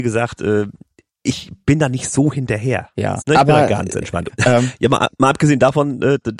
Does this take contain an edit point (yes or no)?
yes